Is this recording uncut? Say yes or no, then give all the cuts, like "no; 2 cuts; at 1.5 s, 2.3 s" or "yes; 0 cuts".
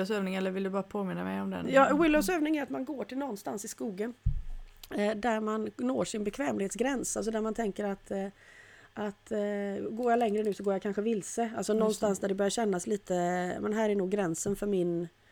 yes; 0 cuts